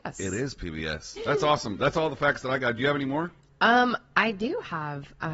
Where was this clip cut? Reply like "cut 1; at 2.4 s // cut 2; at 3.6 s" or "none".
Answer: cut 1; at 1.2 s